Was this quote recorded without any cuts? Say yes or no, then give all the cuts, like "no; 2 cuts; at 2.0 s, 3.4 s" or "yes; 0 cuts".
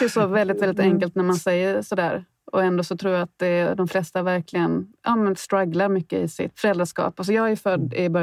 yes; 0 cuts